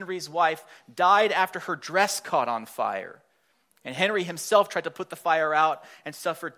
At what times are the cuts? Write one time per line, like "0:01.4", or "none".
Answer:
none